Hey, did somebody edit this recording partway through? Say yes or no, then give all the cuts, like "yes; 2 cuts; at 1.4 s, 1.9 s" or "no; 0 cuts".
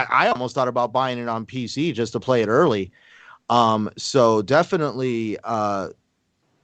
no; 0 cuts